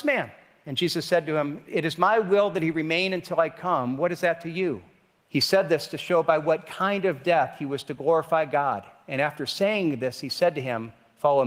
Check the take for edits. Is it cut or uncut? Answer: cut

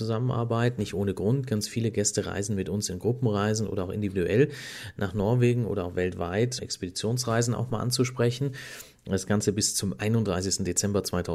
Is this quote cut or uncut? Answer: cut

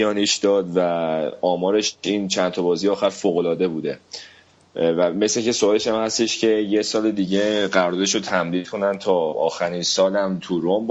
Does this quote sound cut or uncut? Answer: uncut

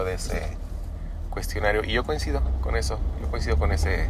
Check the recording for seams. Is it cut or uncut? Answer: uncut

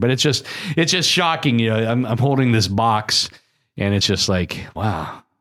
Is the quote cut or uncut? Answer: uncut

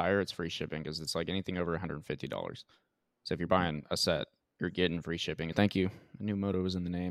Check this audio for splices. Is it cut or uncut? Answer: cut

